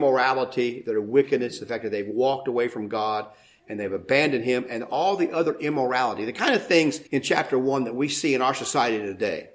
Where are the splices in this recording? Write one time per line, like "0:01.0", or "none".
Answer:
0:07.1